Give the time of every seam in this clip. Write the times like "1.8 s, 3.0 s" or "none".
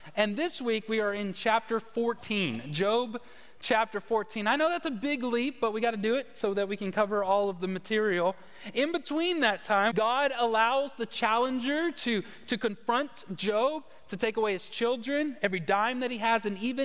9.9 s